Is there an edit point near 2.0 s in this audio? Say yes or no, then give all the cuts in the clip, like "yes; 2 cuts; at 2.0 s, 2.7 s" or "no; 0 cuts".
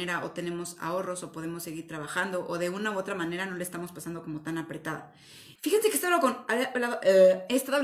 no; 1 cut; at 5.6 s